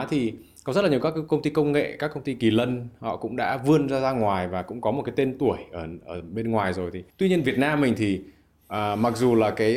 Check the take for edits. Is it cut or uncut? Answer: uncut